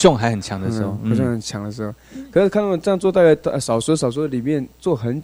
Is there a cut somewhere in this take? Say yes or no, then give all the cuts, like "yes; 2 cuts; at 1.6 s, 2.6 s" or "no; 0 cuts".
no; 0 cuts